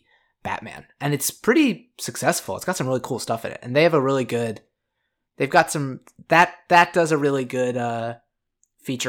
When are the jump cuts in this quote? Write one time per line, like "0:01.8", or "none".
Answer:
none